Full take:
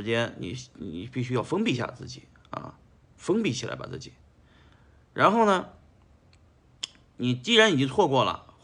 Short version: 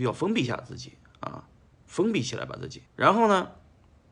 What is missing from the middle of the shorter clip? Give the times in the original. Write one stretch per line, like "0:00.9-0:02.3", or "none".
0:04.2-0:05.0